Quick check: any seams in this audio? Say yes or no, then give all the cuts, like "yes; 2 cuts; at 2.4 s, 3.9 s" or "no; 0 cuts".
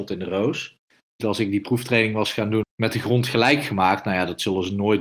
yes; 2 cuts; at 1.2 s, 2.6 s